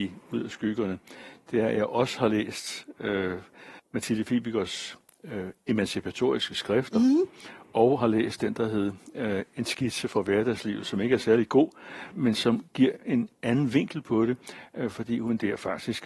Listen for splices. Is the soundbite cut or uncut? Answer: cut